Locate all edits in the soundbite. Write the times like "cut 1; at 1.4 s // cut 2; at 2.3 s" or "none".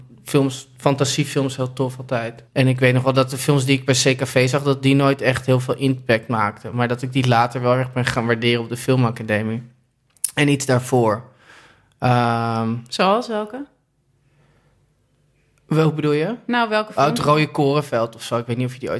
cut 1; at 2.5 s